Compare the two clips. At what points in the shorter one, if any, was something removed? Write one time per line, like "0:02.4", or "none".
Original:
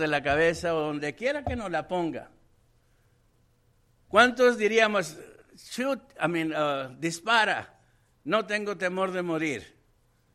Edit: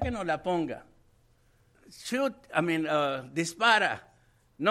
0:01.7